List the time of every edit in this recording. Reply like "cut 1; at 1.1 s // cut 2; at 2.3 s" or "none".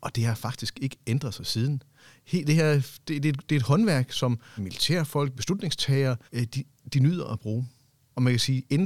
cut 1; at 4.6 s // cut 2; at 6.3 s